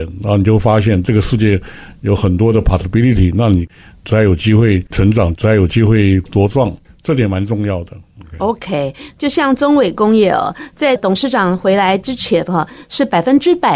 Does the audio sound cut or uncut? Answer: uncut